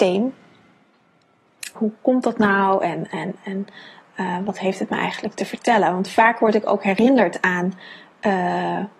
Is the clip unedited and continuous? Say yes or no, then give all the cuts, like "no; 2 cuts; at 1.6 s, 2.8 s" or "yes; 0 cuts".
no; 1 cut; at 1.7 s